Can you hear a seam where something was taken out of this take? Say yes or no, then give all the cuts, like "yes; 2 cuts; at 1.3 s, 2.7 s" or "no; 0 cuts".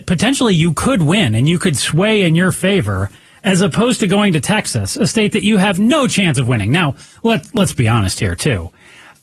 no; 0 cuts